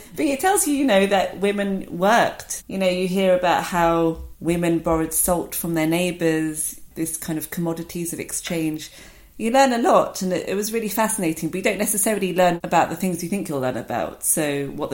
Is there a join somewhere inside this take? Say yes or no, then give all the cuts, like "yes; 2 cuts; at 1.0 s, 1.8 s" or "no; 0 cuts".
yes; 1 cut; at 2.6 s